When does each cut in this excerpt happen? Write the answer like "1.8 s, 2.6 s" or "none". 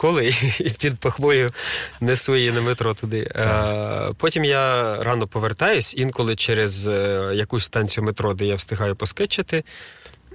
none